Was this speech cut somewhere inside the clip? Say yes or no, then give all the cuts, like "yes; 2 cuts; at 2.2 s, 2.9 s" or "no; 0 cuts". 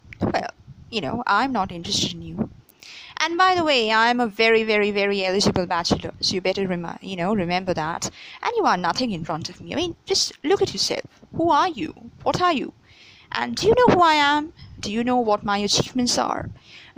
no; 0 cuts